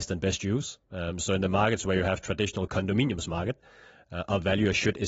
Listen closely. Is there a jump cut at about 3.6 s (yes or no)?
no